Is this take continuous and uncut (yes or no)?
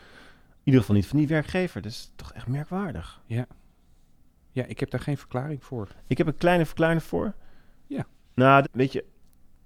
no